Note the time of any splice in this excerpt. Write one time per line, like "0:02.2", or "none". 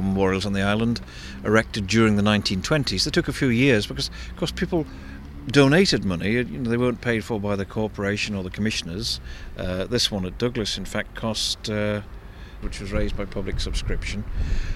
0:12.6